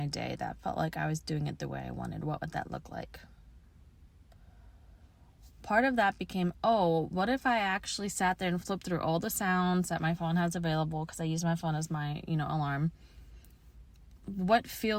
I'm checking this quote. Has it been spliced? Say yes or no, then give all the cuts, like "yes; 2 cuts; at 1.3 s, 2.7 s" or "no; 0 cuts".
no; 0 cuts